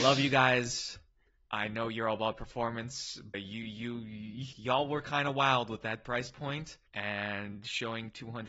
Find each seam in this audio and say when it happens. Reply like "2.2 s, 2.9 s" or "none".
3.3 s, 4.5 s, 6.9 s